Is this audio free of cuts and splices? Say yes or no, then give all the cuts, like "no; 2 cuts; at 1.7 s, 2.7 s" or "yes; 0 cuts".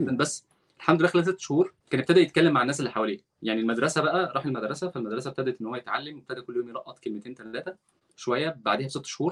no; 1 cut; at 1.8 s